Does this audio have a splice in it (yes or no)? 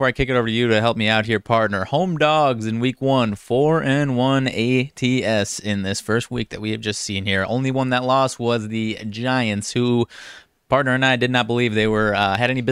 no